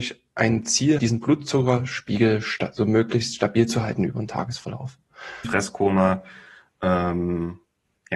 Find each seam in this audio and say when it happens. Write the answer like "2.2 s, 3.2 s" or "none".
1.0 s, 5.4 s